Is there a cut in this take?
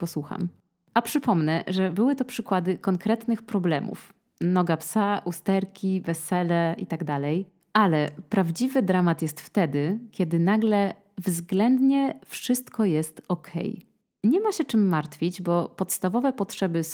no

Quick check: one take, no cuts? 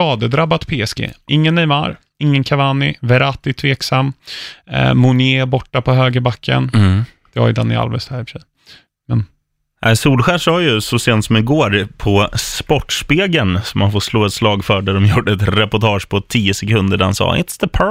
yes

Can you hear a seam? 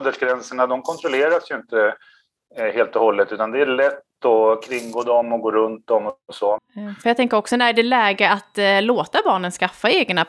yes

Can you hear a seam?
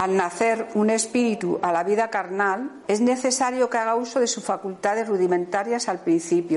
yes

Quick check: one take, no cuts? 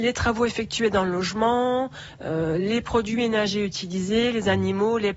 yes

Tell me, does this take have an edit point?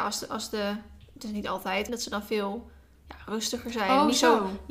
yes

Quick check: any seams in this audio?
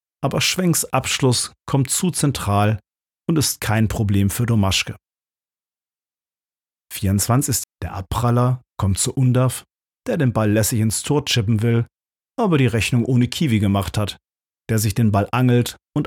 yes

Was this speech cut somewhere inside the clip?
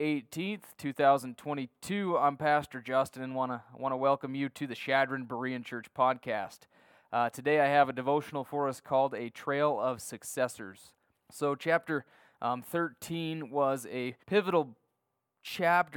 yes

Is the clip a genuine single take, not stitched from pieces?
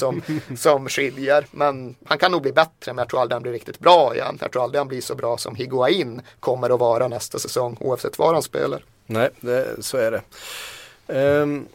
yes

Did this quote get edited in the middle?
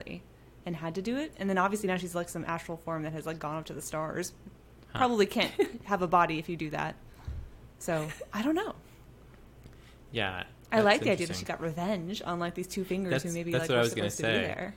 no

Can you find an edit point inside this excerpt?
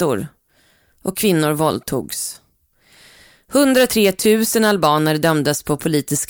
no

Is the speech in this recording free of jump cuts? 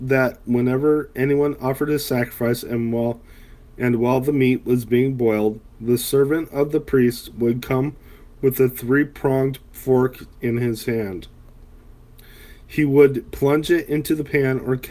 yes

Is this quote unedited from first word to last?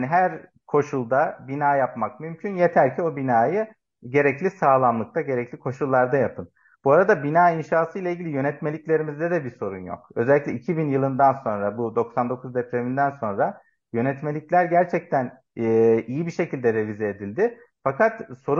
yes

